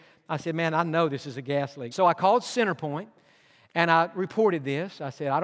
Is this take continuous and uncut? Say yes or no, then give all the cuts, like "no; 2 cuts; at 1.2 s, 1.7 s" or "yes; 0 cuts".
no; 1 cut; at 1.9 s